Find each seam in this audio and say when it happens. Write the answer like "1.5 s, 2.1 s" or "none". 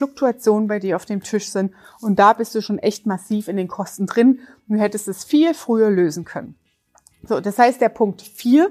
none